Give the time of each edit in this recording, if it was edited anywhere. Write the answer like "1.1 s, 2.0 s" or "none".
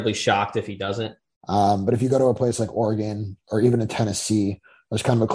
1.4 s